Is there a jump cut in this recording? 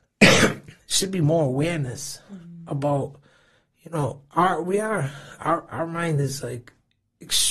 no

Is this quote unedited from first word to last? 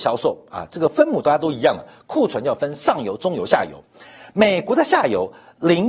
yes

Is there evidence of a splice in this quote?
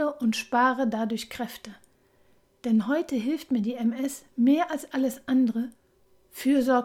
no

